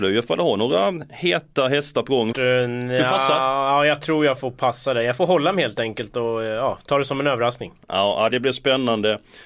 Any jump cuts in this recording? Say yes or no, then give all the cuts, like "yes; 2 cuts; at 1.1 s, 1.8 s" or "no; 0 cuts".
yes; 2 cuts; at 2.3 s, 8.3 s